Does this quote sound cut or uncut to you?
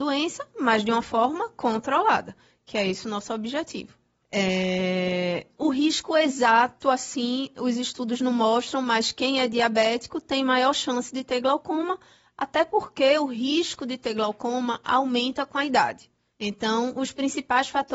cut